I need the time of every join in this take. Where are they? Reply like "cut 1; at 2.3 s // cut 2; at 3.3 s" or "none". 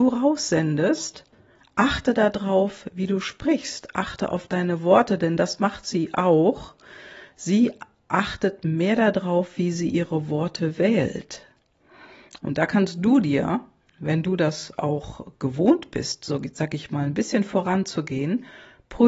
cut 1; at 12.4 s